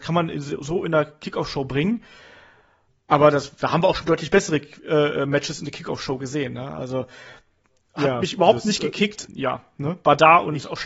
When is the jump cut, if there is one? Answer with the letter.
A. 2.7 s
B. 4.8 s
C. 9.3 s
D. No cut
C